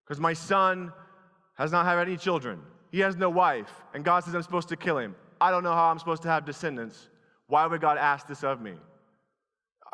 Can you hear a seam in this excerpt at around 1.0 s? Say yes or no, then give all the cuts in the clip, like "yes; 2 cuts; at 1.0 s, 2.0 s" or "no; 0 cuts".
no; 0 cuts